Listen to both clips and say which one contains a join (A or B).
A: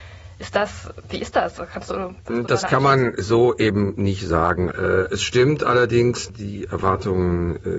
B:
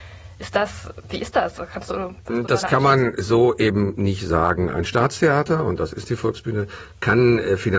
A